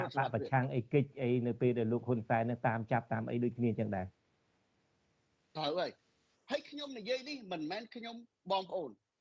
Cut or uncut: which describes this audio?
uncut